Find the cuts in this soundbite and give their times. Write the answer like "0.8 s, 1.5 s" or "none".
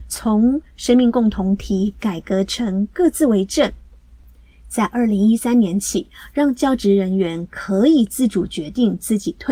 none